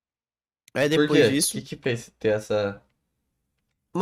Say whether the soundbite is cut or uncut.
uncut